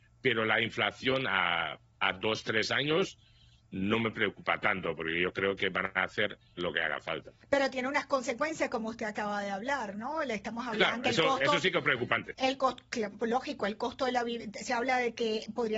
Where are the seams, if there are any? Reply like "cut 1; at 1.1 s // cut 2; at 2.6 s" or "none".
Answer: cut 1; at 6.6 s // cut 2; at 11.0 s